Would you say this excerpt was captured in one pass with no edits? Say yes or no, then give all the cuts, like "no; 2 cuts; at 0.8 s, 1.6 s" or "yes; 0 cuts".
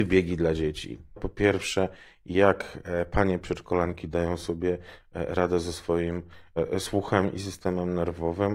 no; 1 cut; at 1.2 s